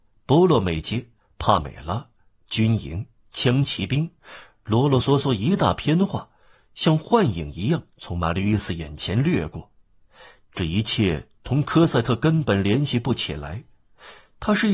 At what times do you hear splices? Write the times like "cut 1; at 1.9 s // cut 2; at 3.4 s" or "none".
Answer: none